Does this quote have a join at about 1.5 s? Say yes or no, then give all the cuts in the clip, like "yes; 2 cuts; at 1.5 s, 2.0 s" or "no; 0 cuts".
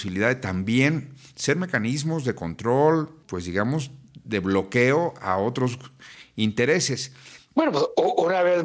no; 2 cuts; at 3.2 s, 7.5 s